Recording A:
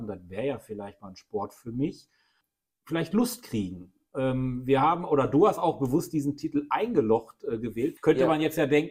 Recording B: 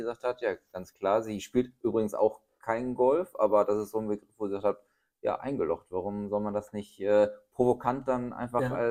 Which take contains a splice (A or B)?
A